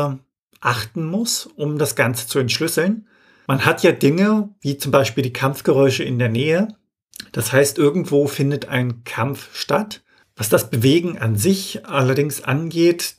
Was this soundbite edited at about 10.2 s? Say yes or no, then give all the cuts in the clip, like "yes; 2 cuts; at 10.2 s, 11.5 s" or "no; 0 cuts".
yes; 1 cut; at 10.2 s